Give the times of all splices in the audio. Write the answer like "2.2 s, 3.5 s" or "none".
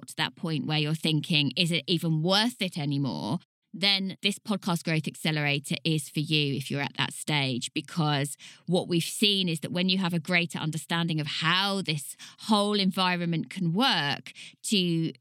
none